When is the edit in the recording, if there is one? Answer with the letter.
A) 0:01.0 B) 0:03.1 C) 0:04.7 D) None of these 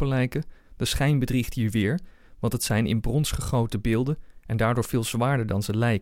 D